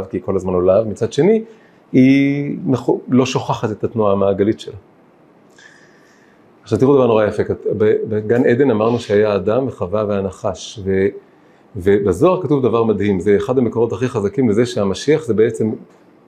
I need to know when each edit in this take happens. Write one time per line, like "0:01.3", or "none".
none